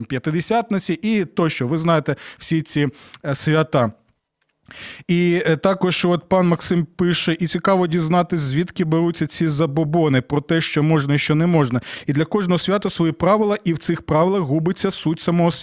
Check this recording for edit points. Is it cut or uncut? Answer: uncut